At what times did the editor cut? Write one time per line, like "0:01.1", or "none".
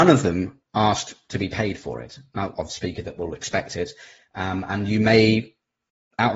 0:02.5